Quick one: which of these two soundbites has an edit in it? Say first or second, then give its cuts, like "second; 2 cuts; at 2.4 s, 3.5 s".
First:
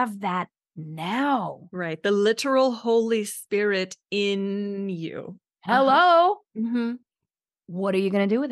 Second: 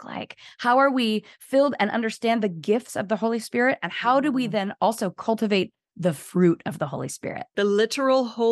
second; 1 cut; at 7.5 s